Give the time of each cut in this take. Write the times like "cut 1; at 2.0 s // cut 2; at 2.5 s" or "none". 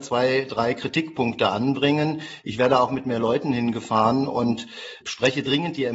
cut 1; at 2.4 s // cut 2; at 5.0 s